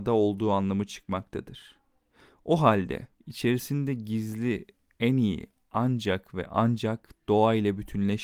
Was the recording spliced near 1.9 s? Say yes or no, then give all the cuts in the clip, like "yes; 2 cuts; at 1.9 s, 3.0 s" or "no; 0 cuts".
no; 1 cut; at 3.1 s